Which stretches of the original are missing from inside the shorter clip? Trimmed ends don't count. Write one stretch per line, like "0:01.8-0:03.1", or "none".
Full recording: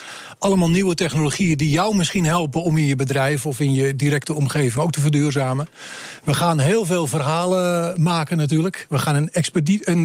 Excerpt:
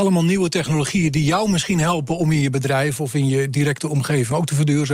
none